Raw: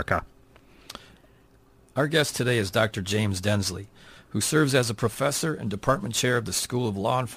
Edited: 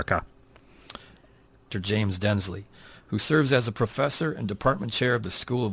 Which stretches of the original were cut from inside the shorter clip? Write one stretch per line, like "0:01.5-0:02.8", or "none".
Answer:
0:01.7-0:02.9